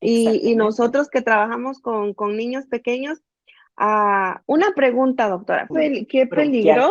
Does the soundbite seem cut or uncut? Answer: cut